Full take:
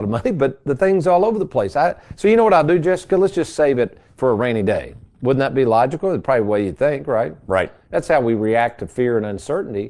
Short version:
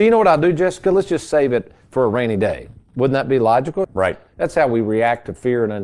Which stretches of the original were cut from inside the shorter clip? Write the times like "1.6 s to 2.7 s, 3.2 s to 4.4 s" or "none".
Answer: 6.1 s to 7.4 s